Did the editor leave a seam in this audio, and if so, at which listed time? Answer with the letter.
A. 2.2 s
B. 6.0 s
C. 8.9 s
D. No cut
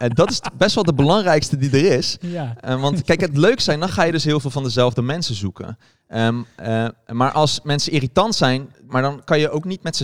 C